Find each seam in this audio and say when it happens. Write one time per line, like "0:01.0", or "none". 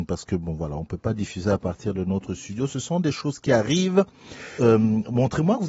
0:04.6

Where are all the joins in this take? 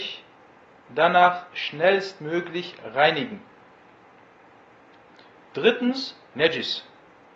0:06.3

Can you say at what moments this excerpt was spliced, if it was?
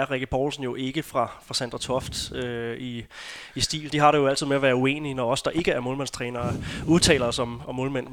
0:03.9

